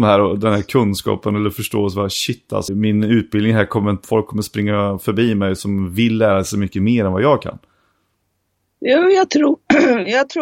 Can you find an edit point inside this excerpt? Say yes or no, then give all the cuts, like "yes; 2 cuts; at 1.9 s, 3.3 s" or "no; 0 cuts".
yes; 2 cuts; at 2.7 s, 4.0 s